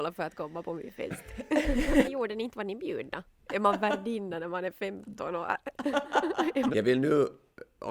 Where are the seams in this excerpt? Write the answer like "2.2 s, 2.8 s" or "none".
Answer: 2.0 s, 3.5 s, 6.7 s